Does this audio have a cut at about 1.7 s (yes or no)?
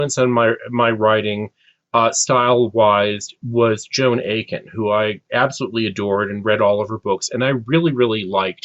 no